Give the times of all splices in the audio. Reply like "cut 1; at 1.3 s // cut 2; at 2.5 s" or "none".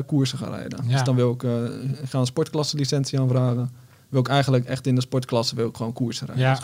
none